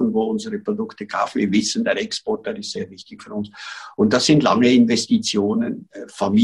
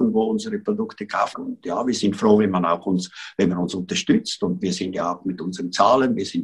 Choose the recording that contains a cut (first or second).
second